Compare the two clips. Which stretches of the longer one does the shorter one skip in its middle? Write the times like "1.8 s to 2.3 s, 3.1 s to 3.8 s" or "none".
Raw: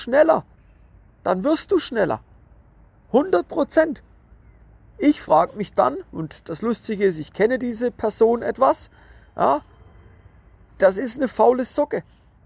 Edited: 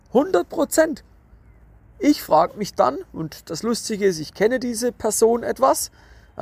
none